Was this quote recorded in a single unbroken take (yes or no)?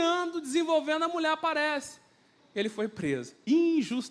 no